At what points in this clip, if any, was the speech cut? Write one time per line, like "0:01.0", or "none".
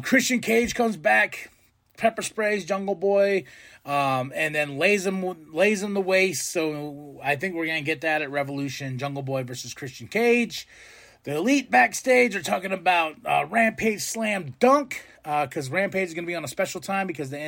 none

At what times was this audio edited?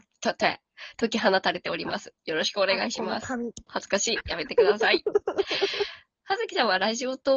0:03.7

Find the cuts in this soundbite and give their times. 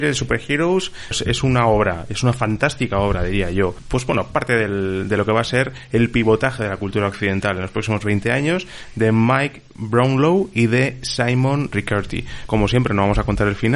0:01.1
0:12.5

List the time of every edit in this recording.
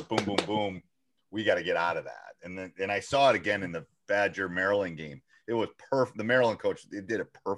none

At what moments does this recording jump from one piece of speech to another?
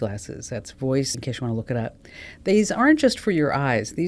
0:01.1

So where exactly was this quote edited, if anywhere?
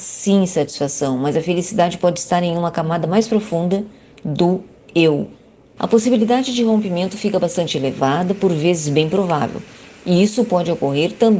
0:05.8

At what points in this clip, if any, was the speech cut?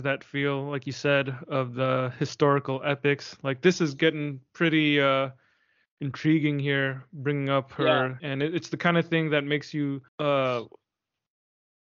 0:08.2
0:10.1

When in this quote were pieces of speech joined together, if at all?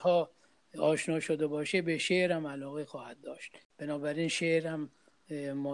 none

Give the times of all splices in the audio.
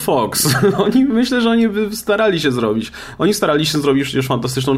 none

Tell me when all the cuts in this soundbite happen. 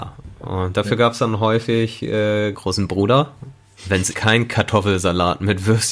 0:02.5
0:04.1

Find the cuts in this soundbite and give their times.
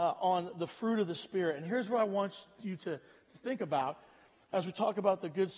none

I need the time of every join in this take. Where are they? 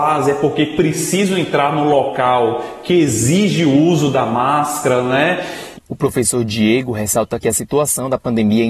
0:05.7

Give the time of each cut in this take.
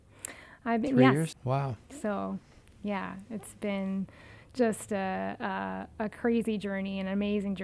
0:01.3

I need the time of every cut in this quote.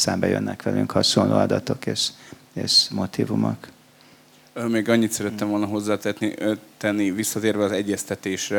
none

